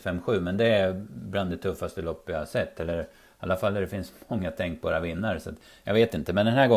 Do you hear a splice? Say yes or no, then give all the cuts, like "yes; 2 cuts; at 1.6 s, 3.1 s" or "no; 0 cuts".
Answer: no; 0 cuts